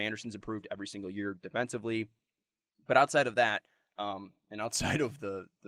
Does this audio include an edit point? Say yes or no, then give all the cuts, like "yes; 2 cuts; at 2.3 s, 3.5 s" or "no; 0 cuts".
no; 0 cuts